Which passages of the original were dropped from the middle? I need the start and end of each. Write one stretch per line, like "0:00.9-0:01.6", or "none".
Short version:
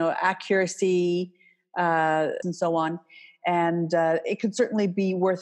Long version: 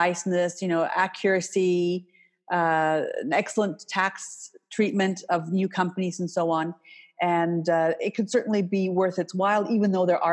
0:03.2-0:06.2